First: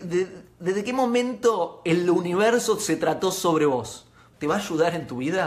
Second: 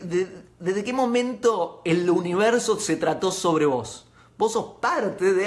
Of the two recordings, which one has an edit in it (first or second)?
first